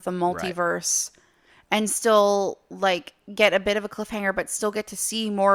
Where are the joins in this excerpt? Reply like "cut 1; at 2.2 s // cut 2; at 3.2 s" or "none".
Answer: none

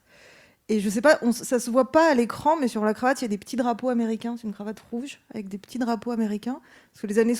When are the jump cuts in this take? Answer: none

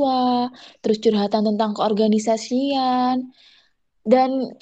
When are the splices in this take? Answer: none

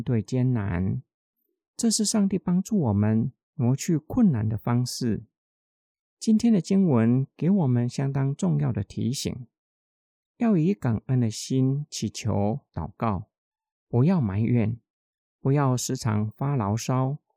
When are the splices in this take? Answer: none

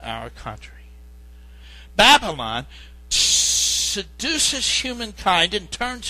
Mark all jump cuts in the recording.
cut 1; at 3.1 s

